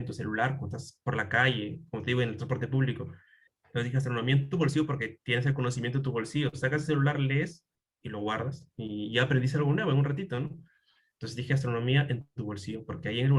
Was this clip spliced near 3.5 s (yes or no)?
yes